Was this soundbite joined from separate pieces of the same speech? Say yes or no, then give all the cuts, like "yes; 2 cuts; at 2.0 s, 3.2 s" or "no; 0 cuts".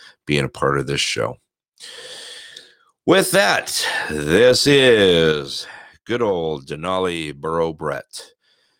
no; 0 cuts